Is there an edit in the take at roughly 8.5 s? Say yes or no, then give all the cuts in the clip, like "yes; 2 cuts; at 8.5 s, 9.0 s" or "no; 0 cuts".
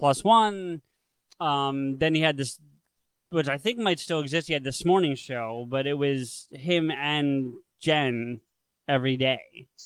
no; 0 cuts